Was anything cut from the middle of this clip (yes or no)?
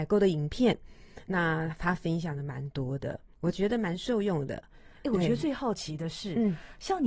no